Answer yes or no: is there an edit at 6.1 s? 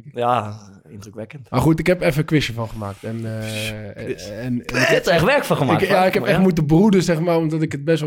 no